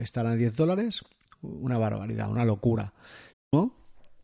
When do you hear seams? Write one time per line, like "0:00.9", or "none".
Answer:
0:03.3